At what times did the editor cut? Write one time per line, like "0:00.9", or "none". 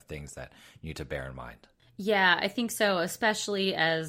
none